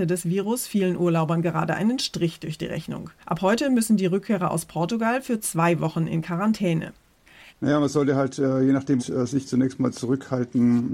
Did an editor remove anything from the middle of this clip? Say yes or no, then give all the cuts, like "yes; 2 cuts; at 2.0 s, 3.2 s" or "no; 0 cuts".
yes; 3 cuts; at 3.2 s, 7.5 s, 9.0 s